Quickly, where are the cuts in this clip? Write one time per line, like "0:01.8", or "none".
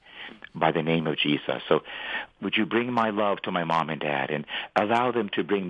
0:02.3